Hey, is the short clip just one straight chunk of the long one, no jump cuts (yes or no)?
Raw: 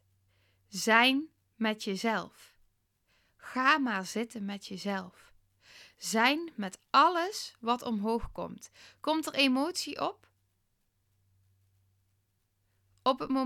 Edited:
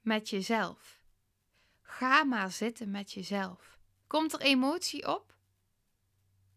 no